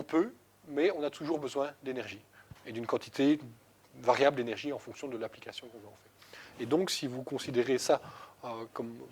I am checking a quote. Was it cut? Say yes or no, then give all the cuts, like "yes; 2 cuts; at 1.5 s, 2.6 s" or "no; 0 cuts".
yes; 1 cut; at 6.5 s